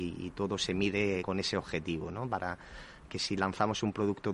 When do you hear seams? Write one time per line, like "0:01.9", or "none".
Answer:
0:01.2
0:03.1